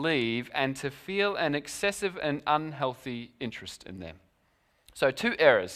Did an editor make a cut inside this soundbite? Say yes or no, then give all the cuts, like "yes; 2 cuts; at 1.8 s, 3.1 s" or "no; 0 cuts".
yes; 1 cut; at 4.9 s